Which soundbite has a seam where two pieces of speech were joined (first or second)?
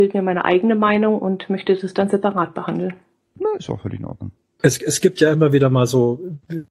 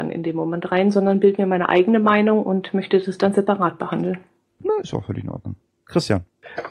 first